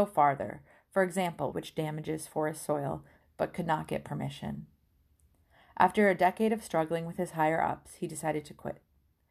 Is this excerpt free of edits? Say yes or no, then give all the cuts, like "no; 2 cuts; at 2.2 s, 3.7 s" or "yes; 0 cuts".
no; 2 cuts; at 1.5 s, 3.2 s